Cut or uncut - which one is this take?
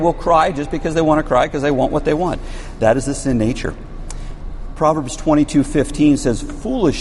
uncut